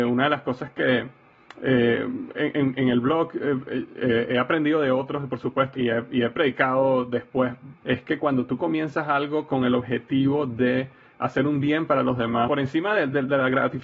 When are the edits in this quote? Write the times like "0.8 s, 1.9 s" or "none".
5.7 s, 7.8 s, 12.5 s